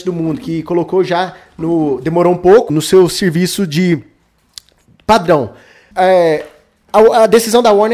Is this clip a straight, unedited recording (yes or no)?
no